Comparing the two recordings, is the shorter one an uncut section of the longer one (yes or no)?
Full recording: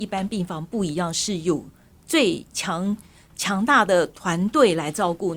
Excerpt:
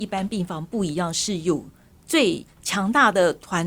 no